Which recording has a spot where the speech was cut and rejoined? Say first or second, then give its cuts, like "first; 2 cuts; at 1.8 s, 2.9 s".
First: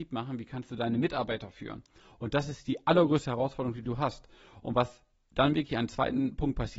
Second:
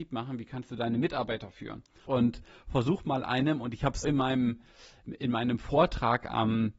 second; 2 cuts; at 2.1 s, 4.0 s